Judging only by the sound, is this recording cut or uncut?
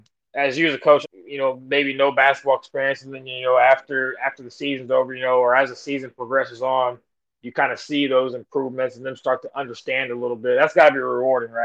cut